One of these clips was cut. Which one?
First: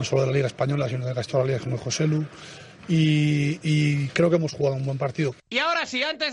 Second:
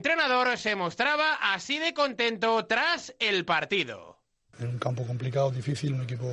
second; 1 cut; at 4.5 s

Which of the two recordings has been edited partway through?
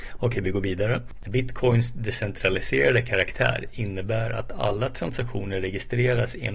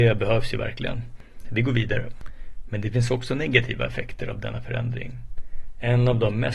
first; 1 cut; at 1.2 s

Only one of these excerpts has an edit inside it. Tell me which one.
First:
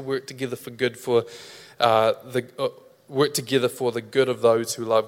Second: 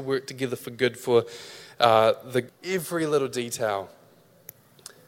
second; 1 cut; at 2.5 s

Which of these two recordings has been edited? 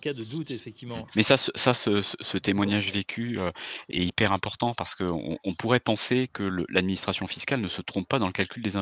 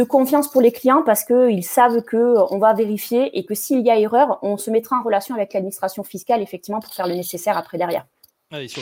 first; 2 cuts; at 1.1 s, 3.9 s

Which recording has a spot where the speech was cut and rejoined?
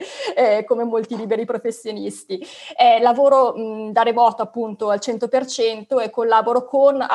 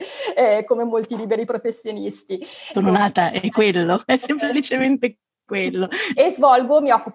second; 2 cuts; at 2.7 s, 6.1 s

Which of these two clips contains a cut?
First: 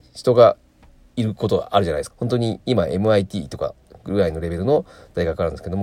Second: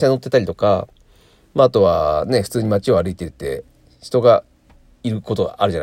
first; 1 cut; at 2.1 s

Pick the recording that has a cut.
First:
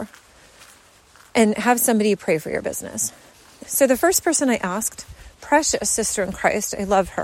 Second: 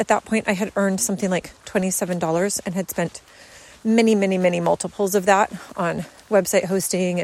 first; 1 cut; at 3.6 s

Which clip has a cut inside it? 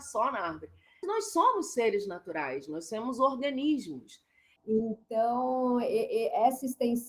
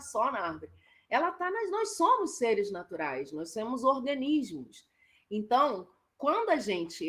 first; 2 cuts; at 1.0 s, 4.6 s

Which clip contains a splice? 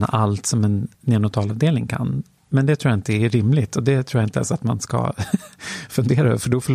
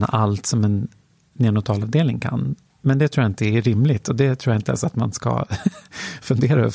first; 1 cut; at 0.9 s

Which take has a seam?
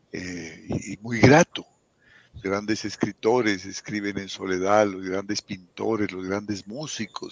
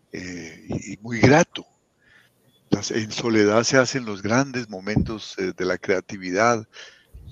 first; 1 cut; at 2.3 s

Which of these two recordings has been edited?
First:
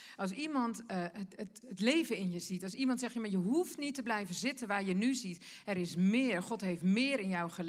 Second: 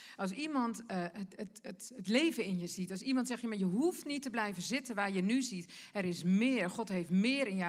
first; 1 cut; at 1.6 s

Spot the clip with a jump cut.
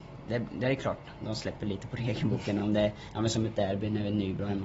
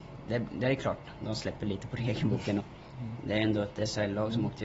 second; 1 cut; at 2.6 s

